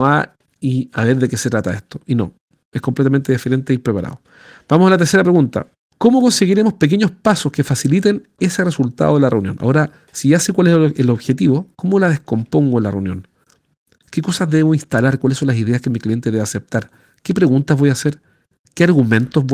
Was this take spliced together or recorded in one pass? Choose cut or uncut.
uncut